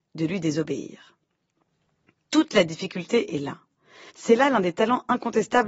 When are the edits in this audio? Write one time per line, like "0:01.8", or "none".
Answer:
0:04.1